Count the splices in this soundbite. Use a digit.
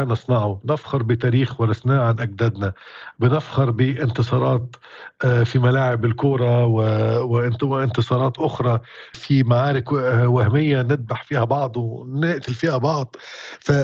1